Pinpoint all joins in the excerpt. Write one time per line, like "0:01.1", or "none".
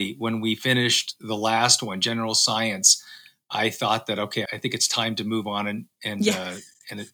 0:04.5